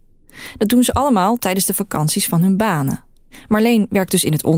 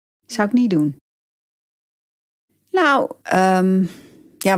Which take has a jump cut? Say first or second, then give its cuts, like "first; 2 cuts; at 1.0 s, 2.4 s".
second; 1 cut; at 3.2 s